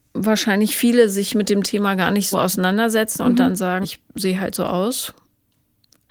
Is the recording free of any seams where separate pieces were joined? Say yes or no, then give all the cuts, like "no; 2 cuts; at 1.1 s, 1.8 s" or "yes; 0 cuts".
no; 2 cuts; at 2.3 s, 3.8 s